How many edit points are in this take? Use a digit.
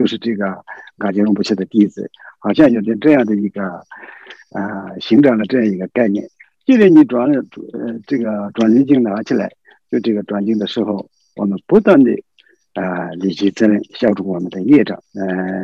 1